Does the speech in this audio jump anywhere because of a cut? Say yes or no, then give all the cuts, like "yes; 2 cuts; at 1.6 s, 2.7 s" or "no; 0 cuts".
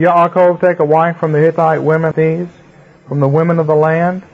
yes; 1 cut; at 2.1 s